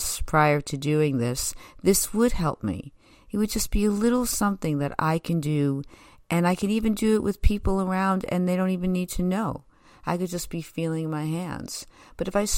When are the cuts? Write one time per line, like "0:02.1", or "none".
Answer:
none